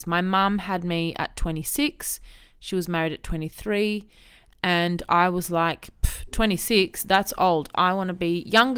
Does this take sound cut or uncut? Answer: uncut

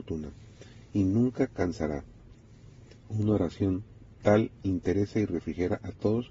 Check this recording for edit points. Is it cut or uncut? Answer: uncut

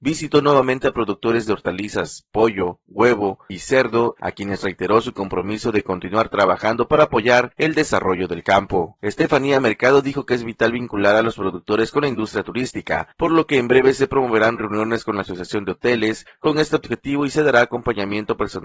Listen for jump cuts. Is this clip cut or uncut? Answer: cut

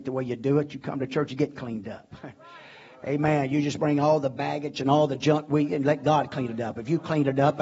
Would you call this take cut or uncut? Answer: uncut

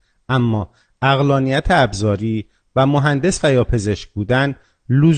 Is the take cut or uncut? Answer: uncut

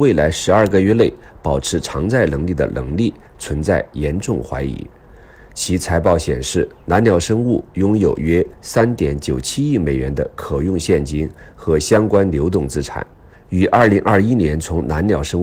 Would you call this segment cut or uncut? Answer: cut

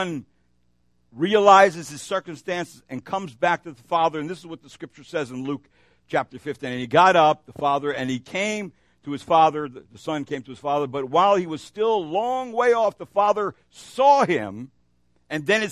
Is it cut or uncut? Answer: uncut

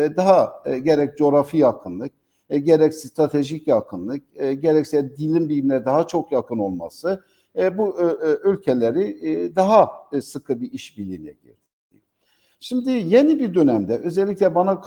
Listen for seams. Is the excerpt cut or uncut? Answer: uncut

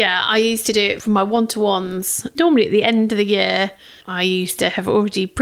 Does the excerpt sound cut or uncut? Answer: cut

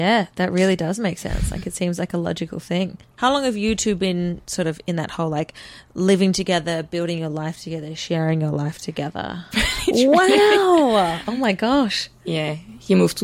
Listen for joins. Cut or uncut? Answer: cut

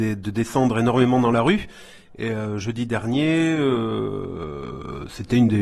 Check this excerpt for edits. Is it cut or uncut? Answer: uncut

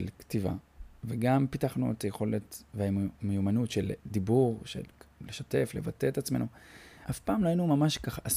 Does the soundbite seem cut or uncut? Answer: cut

